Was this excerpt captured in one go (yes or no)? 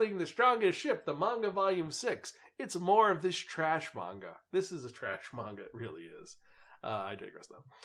yes